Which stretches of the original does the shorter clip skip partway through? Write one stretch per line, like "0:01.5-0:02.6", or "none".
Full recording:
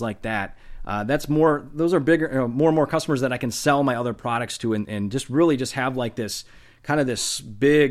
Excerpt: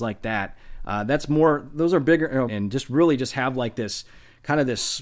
0:02.5-0:04.9